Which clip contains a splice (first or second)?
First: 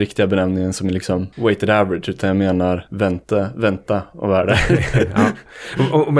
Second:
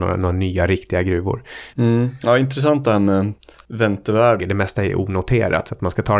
second